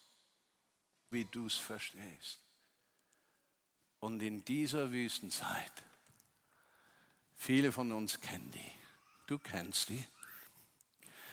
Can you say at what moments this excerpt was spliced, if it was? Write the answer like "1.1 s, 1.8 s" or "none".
1.1 s